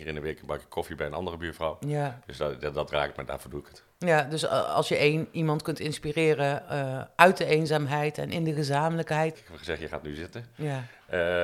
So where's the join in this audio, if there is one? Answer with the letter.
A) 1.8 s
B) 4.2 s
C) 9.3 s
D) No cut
C